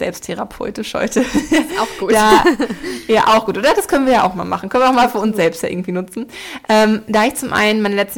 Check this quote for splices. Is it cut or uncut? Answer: uncut